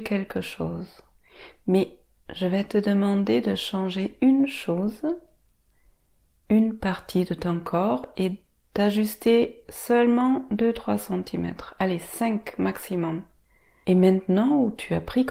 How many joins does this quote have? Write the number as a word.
one